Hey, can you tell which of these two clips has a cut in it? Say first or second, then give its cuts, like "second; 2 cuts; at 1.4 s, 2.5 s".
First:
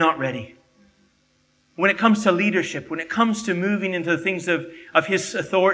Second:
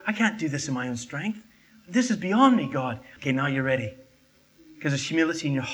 second; 1 cut; at 3.2 s